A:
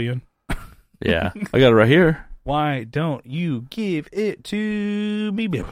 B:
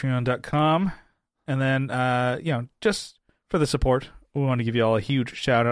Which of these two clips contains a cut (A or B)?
A